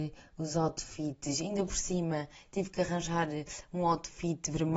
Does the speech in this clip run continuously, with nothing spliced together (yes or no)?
yes